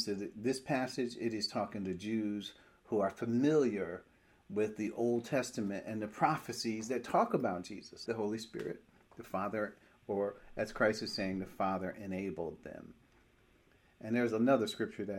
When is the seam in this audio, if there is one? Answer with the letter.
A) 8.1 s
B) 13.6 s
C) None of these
A